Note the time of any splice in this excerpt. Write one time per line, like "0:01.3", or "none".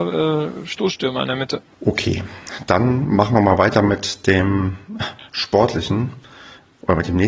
0:01.7

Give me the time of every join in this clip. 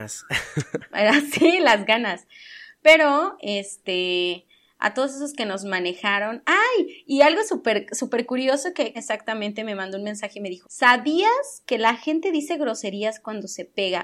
0:08.9
0:10.6

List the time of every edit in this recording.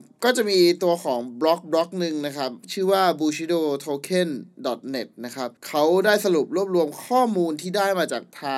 0:05.6

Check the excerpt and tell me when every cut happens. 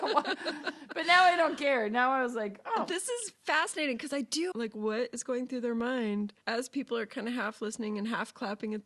0:04.5
0:06.4

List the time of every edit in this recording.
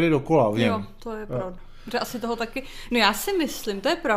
none

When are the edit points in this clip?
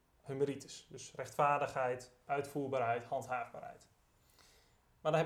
0:02.3

